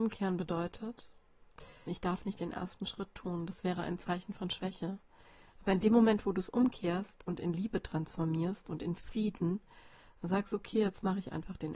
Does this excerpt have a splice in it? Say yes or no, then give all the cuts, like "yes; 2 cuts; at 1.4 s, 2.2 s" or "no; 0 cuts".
yes; 1 cut; at 1.9 s